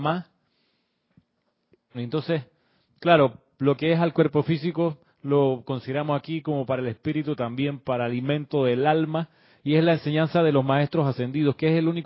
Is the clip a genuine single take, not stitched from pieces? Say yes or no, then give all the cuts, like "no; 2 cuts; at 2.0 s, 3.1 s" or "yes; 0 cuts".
no; 1 cut; at 1.9 s